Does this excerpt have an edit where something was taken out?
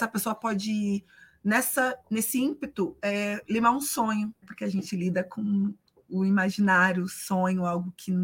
yes; 1 cut; at 4.4 s

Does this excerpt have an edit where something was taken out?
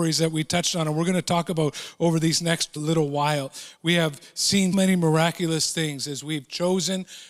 yes; 2 cuts; at 2.8 s, 4.7 s

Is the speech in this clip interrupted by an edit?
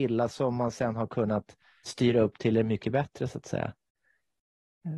yes; 1 cut; at 1.8 s

